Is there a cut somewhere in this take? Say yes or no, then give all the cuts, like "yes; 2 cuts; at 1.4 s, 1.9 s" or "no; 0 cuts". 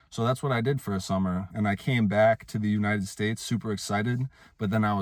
yes; 1 cut; at 1.5 s